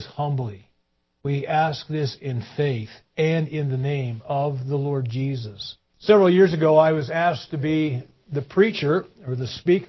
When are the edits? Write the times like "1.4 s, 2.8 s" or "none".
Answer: 5.9 s